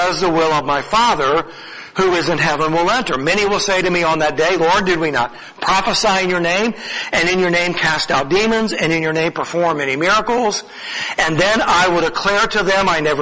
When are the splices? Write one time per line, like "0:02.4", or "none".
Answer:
none